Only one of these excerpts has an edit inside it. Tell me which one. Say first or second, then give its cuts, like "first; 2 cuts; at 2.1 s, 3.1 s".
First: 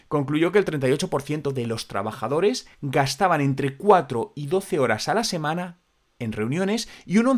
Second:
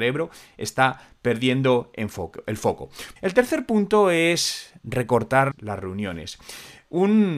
second; 2 cuts; at 3.2 s, 5.5 s